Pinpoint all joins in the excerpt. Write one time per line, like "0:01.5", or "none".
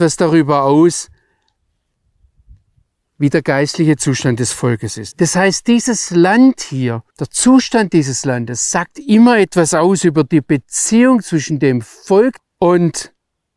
0:05.1
0:07.1
0:12.4